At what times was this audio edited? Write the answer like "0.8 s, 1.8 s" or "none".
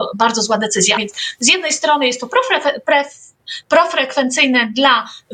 1.0 s

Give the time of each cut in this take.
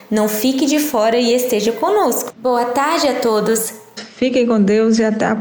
2.3 s, 4.0 s

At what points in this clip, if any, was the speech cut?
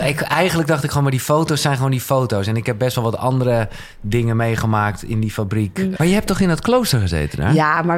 6.0 s

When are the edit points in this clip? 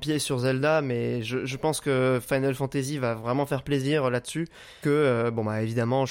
4.8 s

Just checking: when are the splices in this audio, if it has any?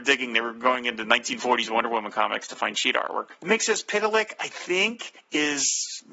none

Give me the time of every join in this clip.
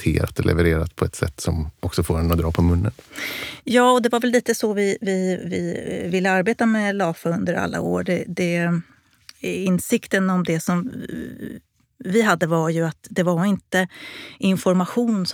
none

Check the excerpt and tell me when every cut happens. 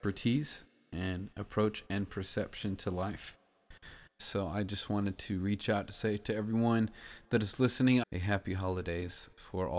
4.2 s, 8.0 s

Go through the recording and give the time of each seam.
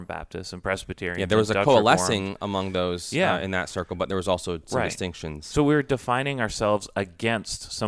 none

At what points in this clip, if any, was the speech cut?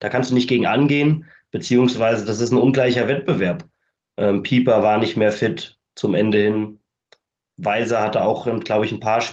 4.0 s

